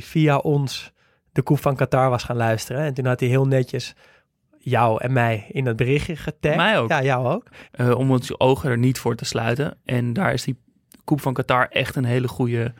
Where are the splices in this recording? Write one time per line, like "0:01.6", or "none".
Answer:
0:07.7